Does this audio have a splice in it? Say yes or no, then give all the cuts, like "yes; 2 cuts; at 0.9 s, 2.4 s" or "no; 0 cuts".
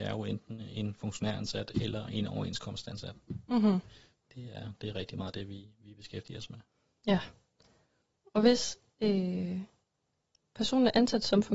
no; 0 cuts